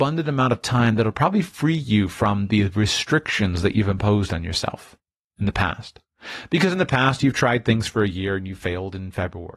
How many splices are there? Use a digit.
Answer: 0